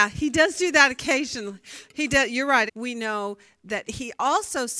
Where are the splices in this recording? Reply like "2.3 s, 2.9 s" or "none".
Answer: 2.7 s, 3.8 s